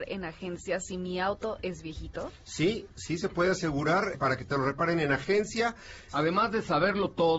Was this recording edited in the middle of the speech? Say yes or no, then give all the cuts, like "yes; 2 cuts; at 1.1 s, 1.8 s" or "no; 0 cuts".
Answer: yes; 2 cuts; at 4.1 s, 6.1 s